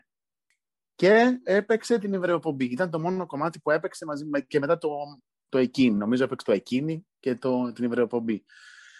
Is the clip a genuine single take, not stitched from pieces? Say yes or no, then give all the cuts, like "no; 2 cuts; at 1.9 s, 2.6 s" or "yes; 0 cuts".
yes; 0 cuts